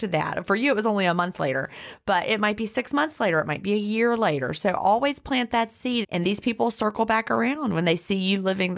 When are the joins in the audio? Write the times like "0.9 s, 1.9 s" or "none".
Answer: 6.0 s